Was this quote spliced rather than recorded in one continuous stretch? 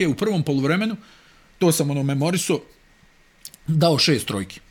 no; 0 cuts

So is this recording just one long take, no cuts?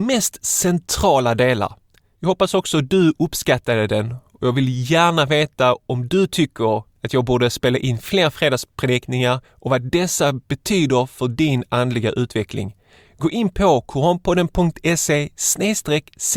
yes; 0 cuts

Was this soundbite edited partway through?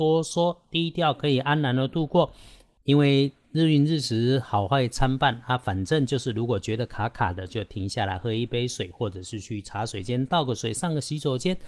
no; 0 cuts

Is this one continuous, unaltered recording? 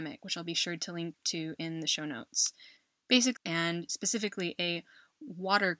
no; 1 cut; at 3.4 s

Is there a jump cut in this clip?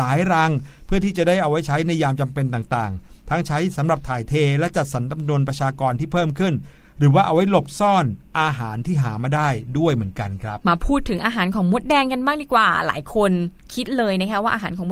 yes; 1 cut; at 10.6 s

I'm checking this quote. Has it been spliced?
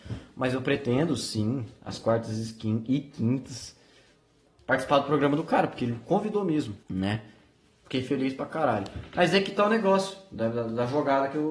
yes; 1 cut; at 6.8 s

